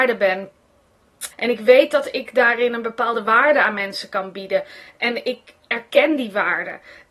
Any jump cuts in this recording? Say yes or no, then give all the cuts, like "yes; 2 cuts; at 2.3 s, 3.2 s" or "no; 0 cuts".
yes; 1 cut; at 1.3 s